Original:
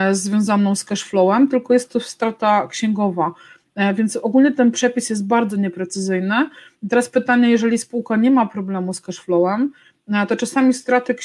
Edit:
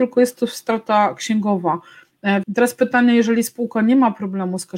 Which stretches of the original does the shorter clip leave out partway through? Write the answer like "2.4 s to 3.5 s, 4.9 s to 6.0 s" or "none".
4.0 s to 6.8 s